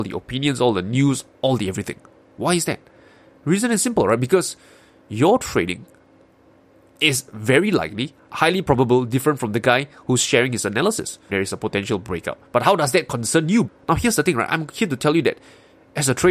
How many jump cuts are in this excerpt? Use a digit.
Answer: 3